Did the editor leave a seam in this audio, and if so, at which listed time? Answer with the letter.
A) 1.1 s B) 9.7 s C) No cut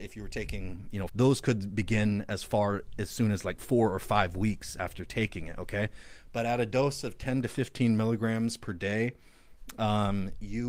A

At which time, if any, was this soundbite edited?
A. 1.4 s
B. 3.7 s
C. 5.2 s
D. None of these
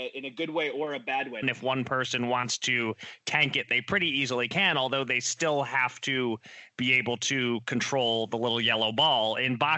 A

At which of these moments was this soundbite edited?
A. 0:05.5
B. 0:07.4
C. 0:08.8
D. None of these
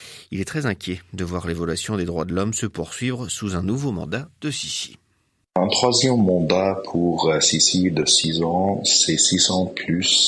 D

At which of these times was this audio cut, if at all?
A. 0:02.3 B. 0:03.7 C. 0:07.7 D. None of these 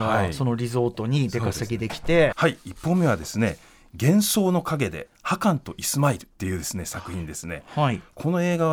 A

